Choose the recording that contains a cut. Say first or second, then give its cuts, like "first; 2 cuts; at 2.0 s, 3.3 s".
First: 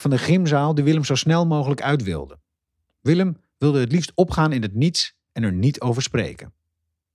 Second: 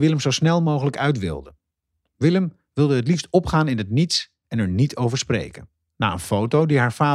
second; 1 cut; at 5.9 s